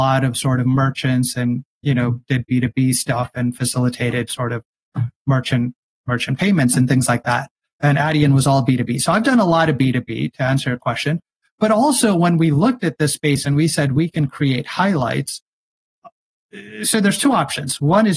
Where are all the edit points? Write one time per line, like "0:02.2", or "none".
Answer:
none